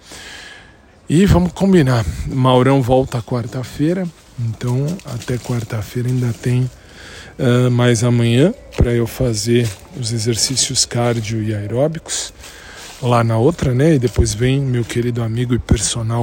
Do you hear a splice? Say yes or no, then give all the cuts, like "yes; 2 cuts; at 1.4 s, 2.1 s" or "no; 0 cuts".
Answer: no; 0 cuts